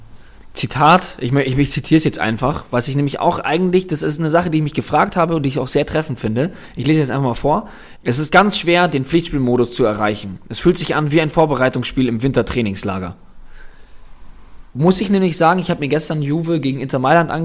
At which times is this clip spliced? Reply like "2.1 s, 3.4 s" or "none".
8.0 s